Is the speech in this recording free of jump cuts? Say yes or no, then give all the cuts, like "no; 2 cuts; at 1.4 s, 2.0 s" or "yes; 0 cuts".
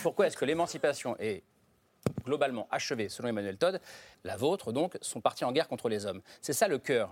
no; 1 cut; at 4.1 s